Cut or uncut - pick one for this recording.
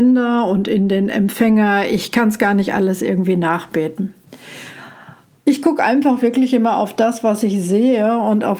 uncut